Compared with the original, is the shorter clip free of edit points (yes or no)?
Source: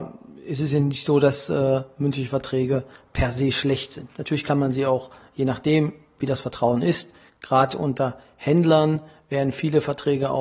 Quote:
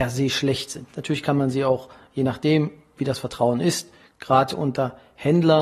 yes